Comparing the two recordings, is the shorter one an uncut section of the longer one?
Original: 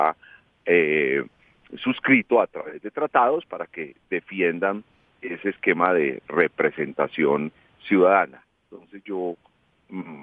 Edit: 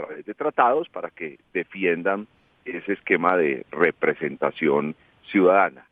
yes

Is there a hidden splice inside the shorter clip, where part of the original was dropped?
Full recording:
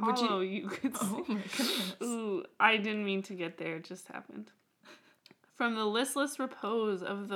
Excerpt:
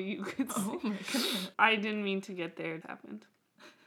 yes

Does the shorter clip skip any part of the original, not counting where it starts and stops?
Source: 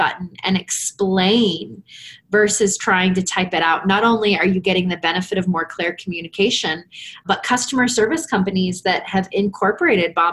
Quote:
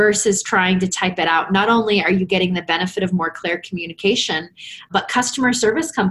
no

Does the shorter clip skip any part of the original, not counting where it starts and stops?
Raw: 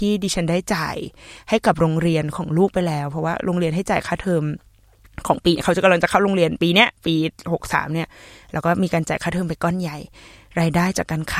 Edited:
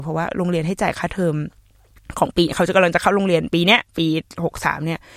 no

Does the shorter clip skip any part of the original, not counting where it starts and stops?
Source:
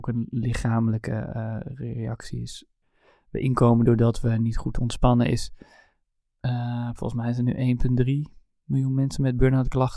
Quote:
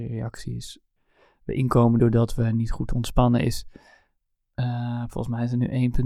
no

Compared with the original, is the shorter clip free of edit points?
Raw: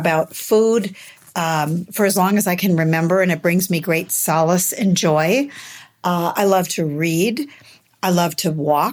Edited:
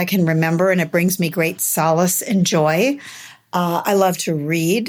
yes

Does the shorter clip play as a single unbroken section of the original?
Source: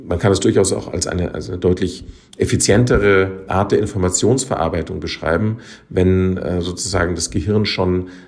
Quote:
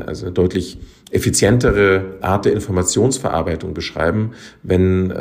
yes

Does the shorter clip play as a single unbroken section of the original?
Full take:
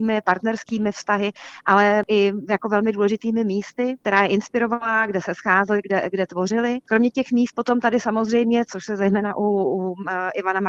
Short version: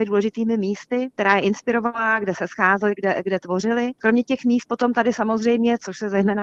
yes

